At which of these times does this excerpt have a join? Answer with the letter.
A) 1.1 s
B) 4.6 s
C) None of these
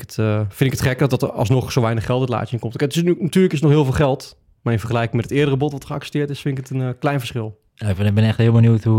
A